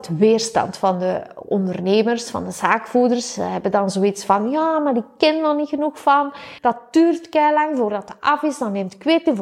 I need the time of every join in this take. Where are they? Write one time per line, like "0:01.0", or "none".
0:06.6